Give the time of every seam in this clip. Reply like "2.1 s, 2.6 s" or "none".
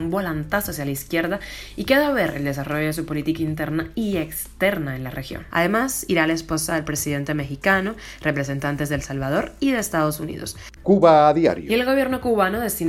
5.5 s, 10.8 s